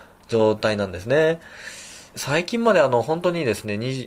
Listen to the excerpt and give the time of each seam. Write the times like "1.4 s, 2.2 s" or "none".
2.1 s